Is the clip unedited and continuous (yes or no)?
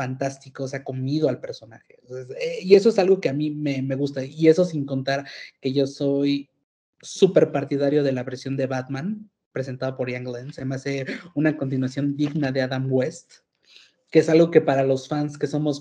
yes